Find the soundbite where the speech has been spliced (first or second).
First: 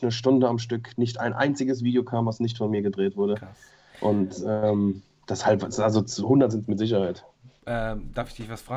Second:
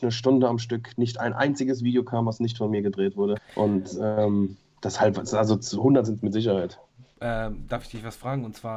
second